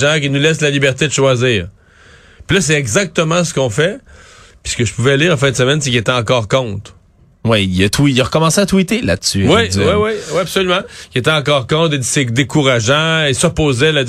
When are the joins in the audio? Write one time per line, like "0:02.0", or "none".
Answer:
none